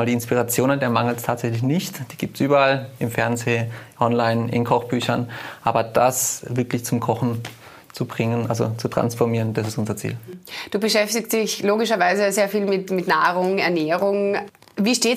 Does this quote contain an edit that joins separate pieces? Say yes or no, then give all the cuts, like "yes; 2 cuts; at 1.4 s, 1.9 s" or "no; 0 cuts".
no; 0 cuts